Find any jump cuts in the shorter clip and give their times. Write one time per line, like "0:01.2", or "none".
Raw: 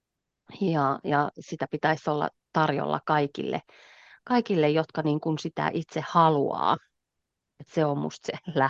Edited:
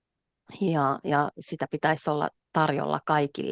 none